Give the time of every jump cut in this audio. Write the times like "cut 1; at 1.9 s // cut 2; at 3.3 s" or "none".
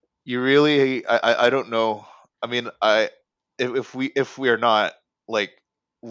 none